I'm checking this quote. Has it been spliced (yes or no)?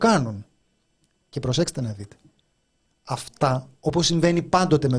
no